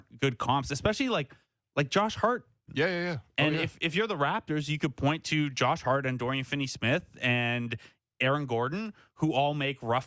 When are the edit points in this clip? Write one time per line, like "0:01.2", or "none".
0:02.7